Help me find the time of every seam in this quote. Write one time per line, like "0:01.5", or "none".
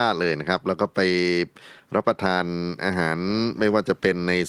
none